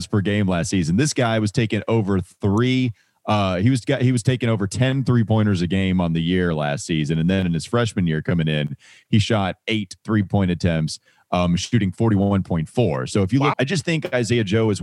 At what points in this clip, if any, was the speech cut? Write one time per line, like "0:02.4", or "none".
0:13.5